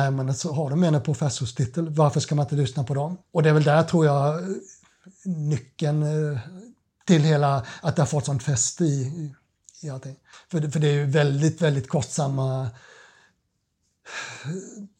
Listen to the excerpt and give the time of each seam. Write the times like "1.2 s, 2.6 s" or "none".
3.2 s, 10.3 s